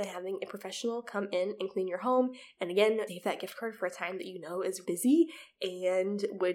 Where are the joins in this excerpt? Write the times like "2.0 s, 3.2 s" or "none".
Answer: 3.1 s, 4.8 s